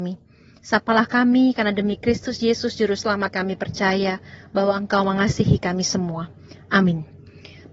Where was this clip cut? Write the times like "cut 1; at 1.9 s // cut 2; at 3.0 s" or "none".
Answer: cut 1; at 3.3 s